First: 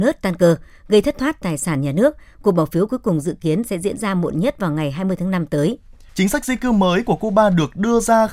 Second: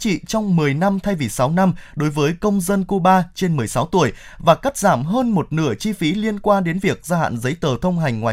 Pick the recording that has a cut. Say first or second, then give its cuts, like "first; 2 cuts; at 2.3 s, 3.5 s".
first; 1 cut; at 6.1 s